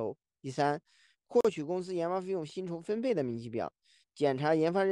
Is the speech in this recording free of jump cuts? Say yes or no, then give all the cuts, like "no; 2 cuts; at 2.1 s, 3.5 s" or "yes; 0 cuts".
yes; 0 cuts